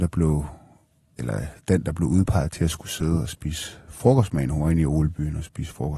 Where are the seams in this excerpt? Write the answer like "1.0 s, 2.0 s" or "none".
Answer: none